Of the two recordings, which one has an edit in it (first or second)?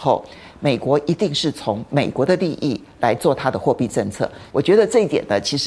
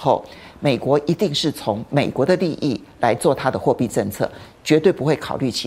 first